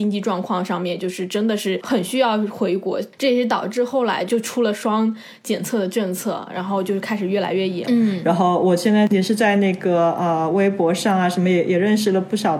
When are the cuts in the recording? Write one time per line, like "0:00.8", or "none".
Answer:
0:07.8